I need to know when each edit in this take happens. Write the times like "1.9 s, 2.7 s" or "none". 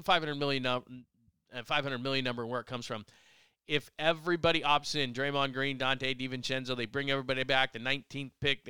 none